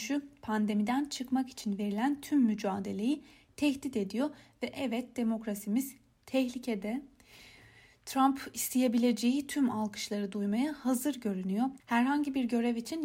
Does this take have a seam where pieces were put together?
yes; 1 cut; at 11.8 s

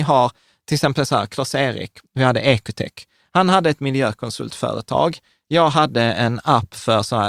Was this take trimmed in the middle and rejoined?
no; 0 cuts

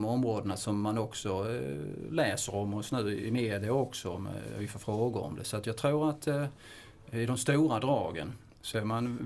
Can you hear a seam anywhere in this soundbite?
no; 0 cuts

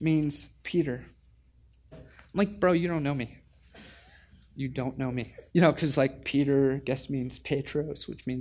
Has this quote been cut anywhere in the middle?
yes; 2 cuts; at 1.9 s, 5.5 s

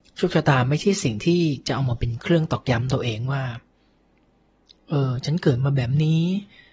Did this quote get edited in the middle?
no; 0 cuts

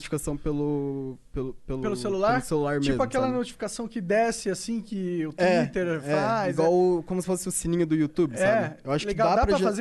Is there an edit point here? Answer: no; 0 cuts

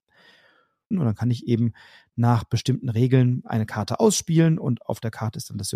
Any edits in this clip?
yes; 1 cut; at 0.9 s

